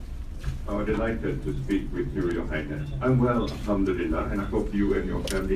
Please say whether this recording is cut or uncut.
uncut